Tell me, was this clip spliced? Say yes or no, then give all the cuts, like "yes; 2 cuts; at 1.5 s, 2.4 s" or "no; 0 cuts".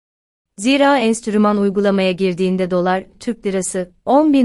no; 0 cuts